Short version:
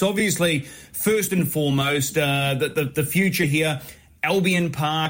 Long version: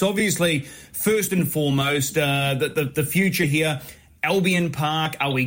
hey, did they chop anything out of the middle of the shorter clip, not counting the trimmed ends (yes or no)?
no